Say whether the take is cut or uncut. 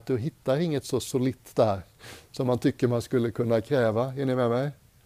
uncut